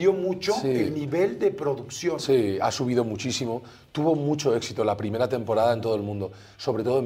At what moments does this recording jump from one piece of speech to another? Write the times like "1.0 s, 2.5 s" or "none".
none